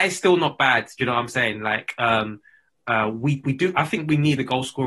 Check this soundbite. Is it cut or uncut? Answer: cut